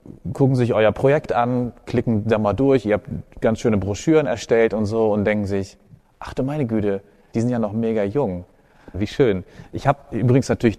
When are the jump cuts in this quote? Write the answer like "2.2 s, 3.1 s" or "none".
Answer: 7.3 s, 8.9 s